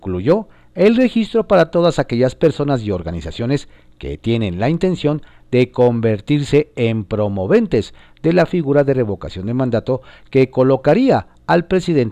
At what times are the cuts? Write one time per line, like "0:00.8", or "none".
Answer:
none